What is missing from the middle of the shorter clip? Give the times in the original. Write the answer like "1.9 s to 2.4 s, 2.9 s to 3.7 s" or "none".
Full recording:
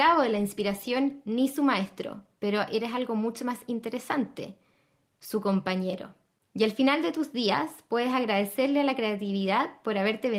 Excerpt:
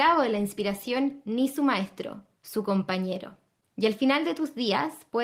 2.4 s to 5.2 s